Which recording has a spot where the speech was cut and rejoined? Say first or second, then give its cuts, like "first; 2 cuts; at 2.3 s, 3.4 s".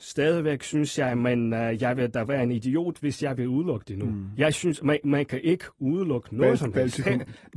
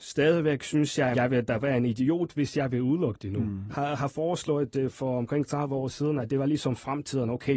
second; 2 cuts; at 1.1 s, 3.7 s